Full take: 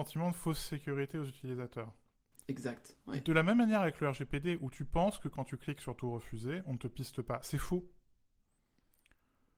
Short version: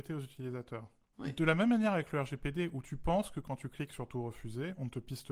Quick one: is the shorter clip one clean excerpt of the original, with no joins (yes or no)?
no